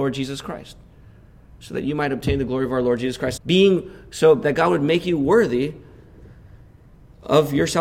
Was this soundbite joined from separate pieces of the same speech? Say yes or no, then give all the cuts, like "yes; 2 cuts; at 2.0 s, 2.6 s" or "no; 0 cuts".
yes; 2 cuts; at 3.4 s, 4.4 s